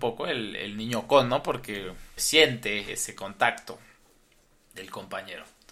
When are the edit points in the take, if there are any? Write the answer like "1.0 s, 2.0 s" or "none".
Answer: 2.2 s